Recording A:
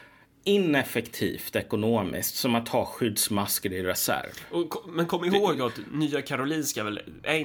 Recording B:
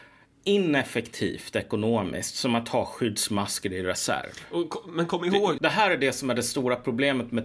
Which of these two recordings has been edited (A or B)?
B